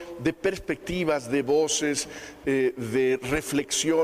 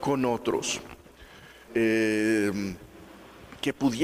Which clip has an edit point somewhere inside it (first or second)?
second